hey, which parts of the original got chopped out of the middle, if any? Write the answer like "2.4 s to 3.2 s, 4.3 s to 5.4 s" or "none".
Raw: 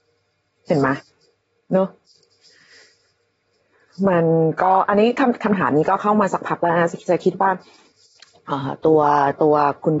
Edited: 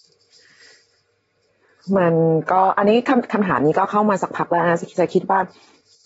none